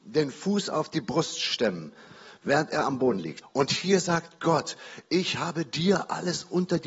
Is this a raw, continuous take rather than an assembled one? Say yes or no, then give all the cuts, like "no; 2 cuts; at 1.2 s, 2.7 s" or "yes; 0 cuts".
no; 1 cut; at 3.4 s